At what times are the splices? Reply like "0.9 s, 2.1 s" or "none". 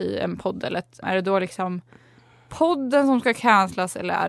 1.0 s